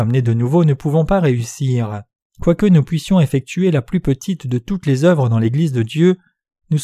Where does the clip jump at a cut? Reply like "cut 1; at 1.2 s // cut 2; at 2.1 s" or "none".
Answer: cut 1; at 2.2 s